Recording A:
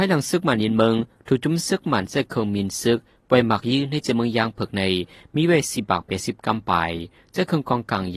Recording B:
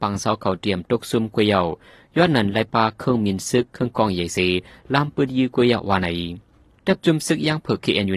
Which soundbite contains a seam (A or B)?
B